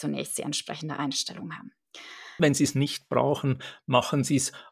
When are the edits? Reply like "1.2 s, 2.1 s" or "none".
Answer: 2.4 s